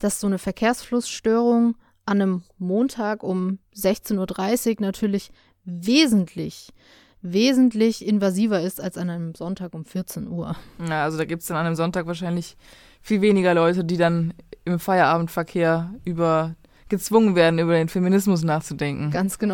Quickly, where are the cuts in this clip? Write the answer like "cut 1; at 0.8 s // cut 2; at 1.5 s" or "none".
none